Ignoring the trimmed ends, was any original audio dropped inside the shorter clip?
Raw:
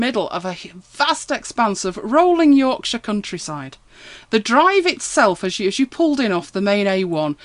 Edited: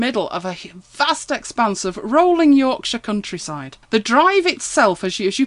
yes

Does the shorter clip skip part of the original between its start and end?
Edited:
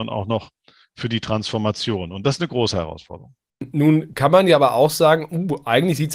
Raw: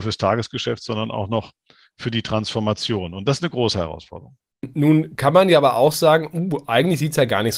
no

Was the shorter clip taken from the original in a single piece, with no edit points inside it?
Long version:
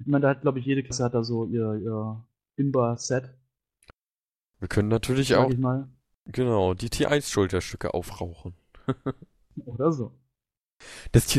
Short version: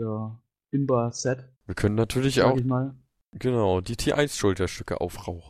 no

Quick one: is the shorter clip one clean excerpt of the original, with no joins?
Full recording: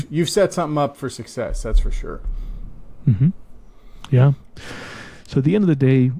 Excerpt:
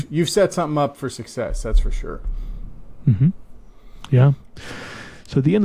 yes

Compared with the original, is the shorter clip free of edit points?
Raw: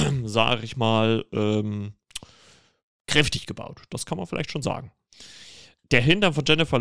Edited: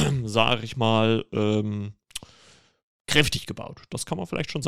yes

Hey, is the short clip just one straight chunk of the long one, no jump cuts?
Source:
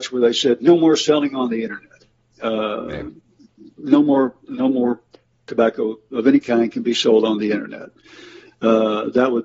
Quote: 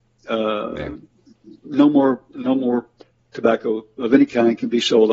yes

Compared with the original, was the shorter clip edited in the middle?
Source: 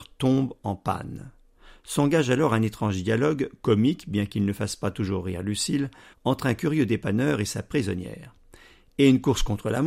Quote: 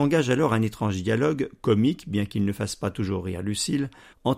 no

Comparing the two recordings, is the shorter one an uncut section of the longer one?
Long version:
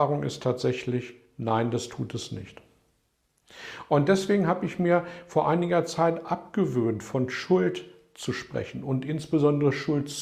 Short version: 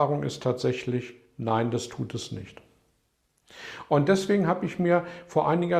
yes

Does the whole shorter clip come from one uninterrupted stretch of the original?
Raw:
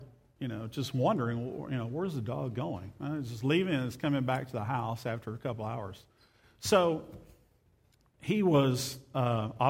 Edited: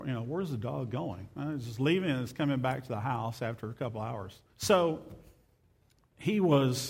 no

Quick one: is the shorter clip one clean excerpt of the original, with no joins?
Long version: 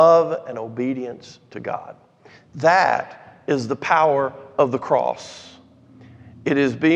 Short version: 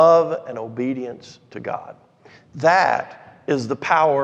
yes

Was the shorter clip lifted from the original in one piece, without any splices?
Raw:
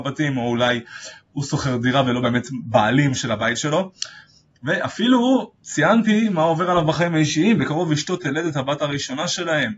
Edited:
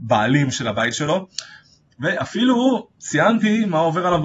yes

